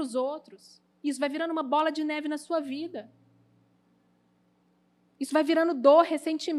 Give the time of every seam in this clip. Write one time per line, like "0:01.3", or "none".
none